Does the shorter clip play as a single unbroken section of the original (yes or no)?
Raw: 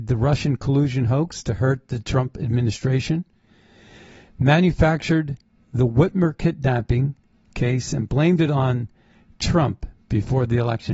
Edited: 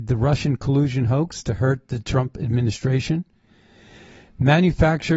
yes